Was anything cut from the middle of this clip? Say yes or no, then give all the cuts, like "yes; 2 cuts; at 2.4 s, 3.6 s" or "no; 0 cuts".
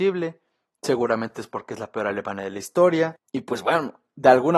no; 0 cuts